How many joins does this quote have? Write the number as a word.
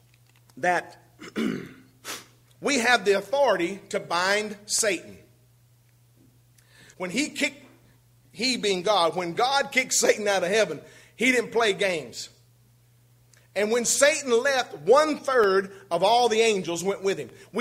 one